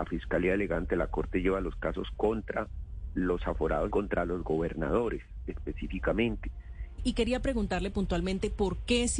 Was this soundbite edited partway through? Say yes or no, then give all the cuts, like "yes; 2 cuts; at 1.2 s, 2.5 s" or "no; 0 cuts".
yes; 2 cuts; at 3.9 s, 7.0 s